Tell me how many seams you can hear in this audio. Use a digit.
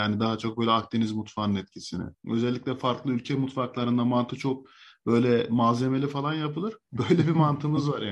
2